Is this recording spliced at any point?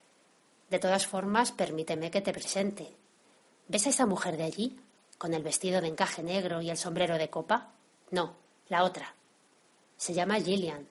no; 0 cuts

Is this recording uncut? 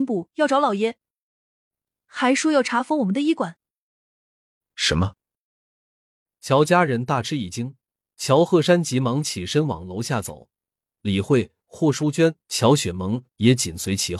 yes; 0 cuts

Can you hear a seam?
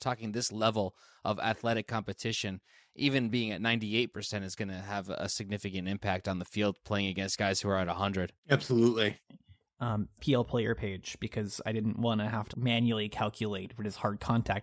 yes; 3 cuts; at 8.4 s, 10.2 s, 12.5 s

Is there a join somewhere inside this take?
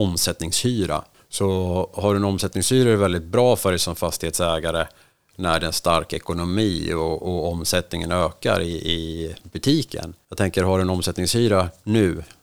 no; 0 cuts

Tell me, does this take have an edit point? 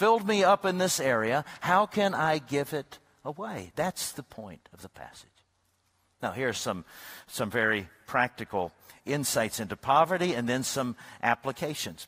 no; 0 cuts

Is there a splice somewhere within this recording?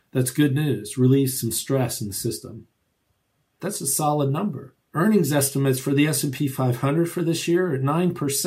yes; 2 cuts; at 3.6 s, 4.9 s

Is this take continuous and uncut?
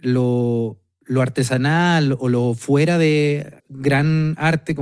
no; 1 cut; at 3.6 s

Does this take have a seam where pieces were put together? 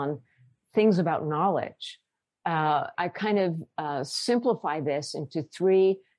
yes; 1 cut; at 2.9 s

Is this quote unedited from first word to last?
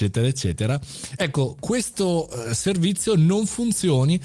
yes; 0 cuts

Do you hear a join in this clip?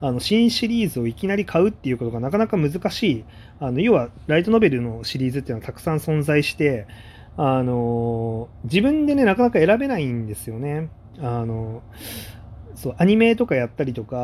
no; 0 cuts

